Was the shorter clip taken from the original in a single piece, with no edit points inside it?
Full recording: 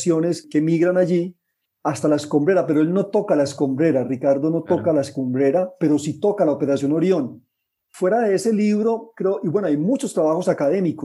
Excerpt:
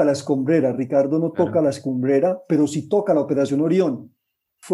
yes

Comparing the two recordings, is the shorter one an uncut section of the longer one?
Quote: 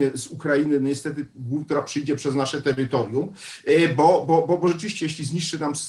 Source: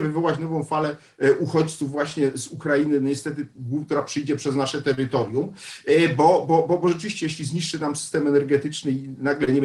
yes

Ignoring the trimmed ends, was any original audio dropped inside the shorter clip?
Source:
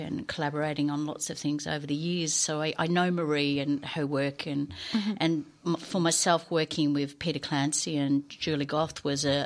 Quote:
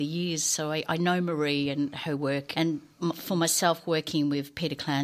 yes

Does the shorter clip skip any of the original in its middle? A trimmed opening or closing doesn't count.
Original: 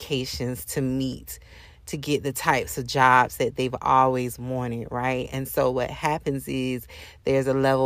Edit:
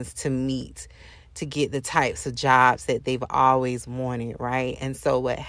no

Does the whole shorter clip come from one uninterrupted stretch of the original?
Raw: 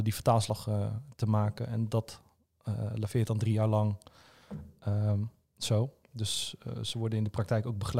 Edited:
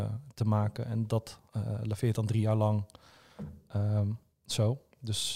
no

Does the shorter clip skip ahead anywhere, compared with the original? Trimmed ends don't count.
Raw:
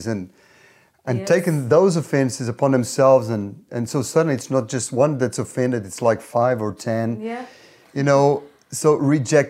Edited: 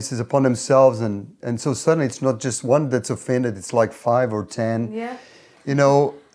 no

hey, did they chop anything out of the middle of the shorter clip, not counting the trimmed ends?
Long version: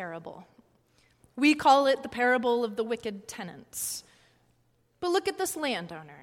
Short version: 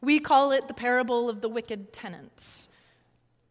no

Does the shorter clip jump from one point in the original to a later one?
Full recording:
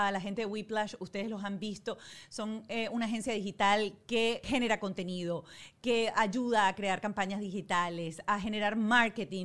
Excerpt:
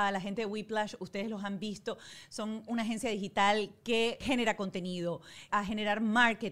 yes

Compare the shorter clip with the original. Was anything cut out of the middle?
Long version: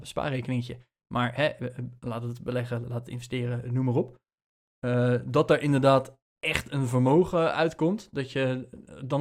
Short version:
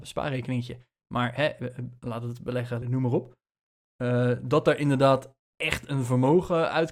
yes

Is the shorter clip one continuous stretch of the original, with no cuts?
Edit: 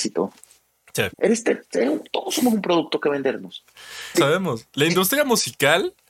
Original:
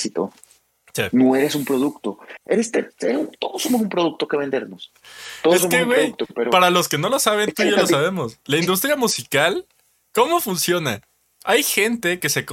no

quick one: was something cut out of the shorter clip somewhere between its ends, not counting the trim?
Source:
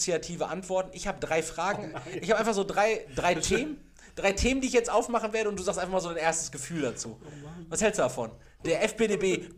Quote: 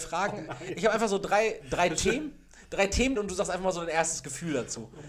yes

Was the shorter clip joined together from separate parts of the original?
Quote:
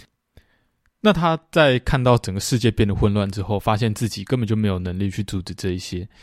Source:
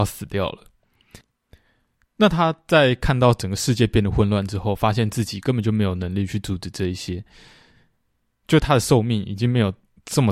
no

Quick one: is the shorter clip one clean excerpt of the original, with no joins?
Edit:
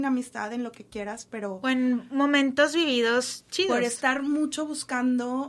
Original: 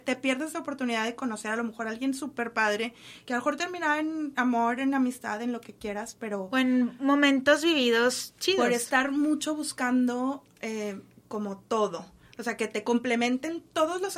yes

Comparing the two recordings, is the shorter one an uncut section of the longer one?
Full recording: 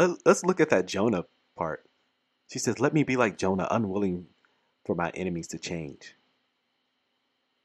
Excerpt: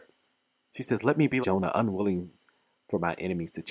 no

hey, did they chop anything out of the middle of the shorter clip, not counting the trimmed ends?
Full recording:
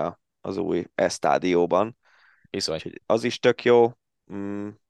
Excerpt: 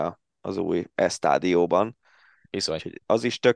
no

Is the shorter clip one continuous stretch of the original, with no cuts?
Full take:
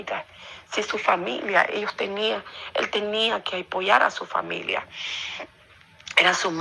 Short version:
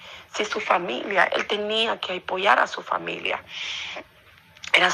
no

